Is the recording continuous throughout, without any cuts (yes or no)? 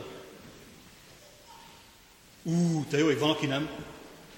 yes